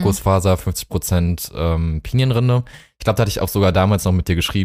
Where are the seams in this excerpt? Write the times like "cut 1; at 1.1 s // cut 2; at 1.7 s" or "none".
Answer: none